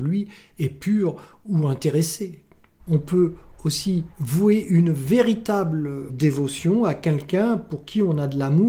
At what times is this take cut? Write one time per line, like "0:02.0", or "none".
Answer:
0:02.8
0:04.1
0:06.1